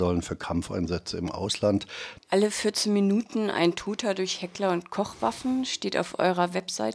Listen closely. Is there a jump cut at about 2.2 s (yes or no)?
yes